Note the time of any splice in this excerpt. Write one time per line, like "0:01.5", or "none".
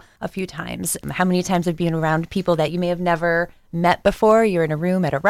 0:01.0